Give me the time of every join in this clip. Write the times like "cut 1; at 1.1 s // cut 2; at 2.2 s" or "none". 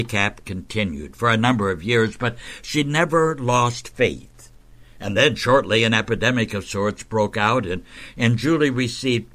none